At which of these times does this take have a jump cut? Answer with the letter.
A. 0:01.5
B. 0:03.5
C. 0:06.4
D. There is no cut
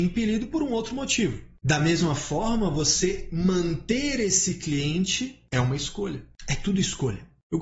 C